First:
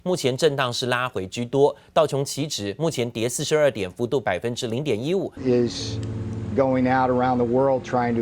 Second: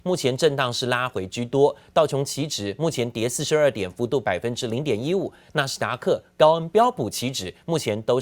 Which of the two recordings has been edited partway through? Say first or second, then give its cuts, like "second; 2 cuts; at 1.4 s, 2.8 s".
first; 2 cuts; at 5.4 s, 6.5 s